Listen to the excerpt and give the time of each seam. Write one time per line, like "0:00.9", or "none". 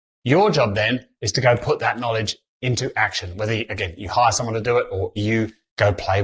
none